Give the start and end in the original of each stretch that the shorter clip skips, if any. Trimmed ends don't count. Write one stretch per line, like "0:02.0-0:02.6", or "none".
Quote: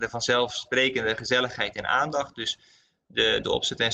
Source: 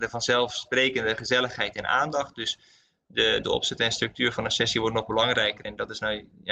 none

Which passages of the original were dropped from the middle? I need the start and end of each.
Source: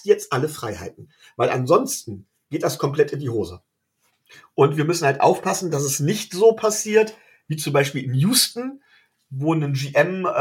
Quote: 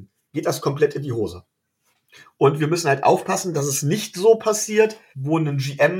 0:07.3-0:09.3

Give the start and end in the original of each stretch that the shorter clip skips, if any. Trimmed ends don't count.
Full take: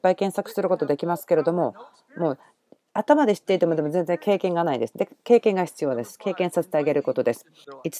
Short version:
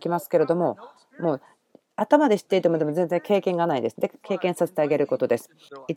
0:05.2-0:06.2

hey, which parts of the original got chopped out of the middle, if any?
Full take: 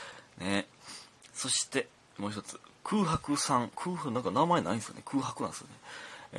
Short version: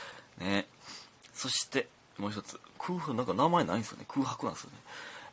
0:02.7-0:03.7

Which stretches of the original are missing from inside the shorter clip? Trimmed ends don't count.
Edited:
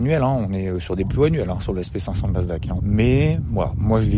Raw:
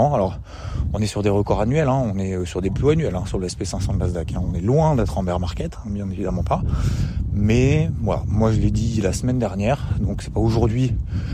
0:04.4-0:07.3

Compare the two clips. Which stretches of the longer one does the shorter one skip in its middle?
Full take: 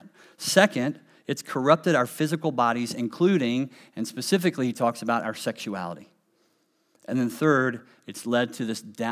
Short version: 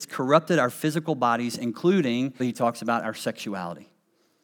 0:03.8-0:04.6

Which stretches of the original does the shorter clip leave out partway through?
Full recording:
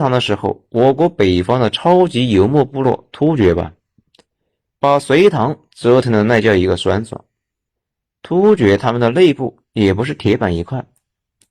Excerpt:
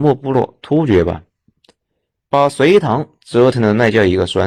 none

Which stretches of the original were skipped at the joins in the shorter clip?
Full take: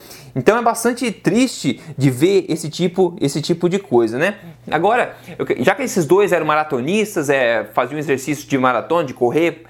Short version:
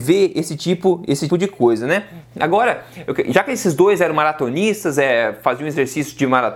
0:03.4-0:03.6

